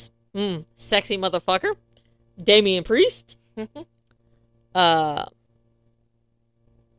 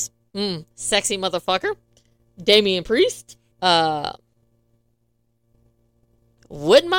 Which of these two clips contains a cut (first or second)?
second